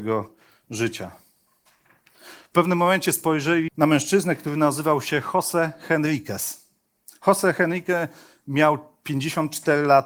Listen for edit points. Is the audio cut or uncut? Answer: cut